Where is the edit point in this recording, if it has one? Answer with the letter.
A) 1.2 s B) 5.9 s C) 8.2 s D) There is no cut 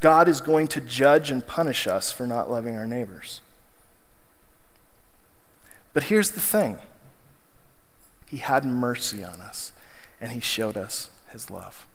C